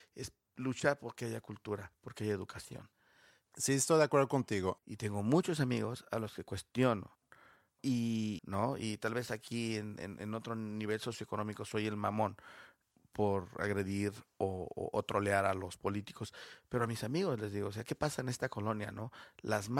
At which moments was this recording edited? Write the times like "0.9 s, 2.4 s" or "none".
4.8 s, 8.4 s